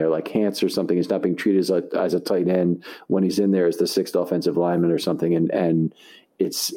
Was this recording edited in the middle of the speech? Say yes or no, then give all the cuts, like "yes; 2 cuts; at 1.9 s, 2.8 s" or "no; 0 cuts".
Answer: no; 0 cuts